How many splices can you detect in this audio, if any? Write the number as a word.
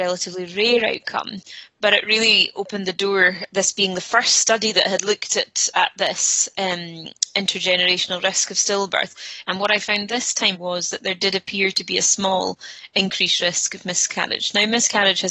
two